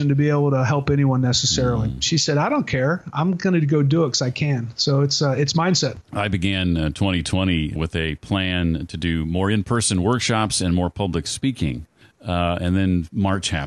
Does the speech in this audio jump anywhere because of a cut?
yes; 2 cuts; at 6.0 s, 7.8 s

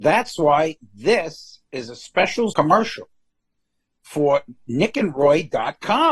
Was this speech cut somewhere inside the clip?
no; 0 cuts

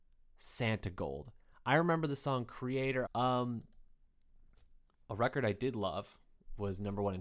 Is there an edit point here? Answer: yes; 1 cut; at 3.1 s

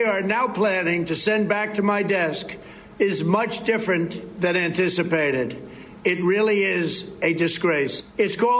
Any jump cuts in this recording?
no; 0 cuts

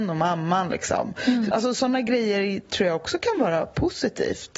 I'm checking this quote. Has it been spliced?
yes; 1 cut; at 1.5 s

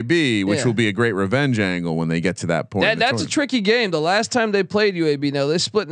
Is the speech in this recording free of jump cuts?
yes; 0 cuts

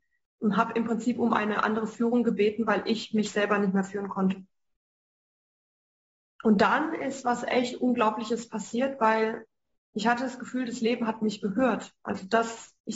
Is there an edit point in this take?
no; 0 cuts

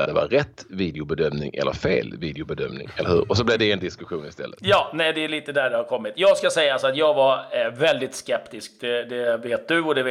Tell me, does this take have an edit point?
no; 0 cuts

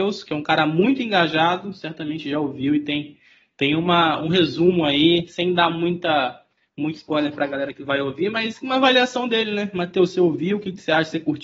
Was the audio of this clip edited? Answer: no; 0 cuts

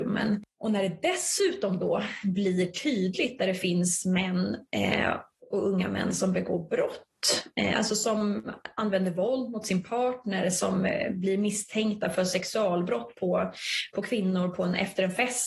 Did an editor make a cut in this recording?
no; 0 cuts

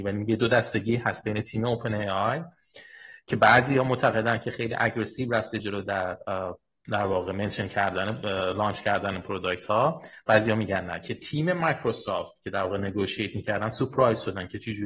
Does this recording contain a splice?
no; 0 cuts

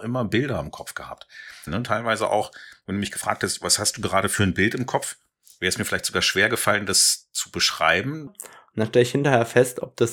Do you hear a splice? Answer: yes; 2 cuts; at 1.7 s, 8.3 s

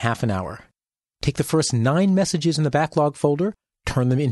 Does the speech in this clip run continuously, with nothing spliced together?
no; 1 cut; at 1.1 s

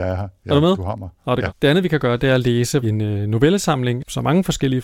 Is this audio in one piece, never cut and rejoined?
no; 2 cuts; at 1.5 s, 2.8 s

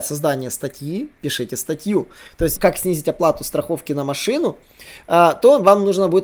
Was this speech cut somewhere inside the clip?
yes; 1 cut; at 2.6 s

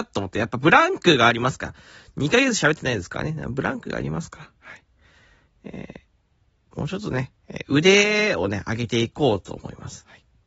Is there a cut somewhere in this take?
no; 0 cuts

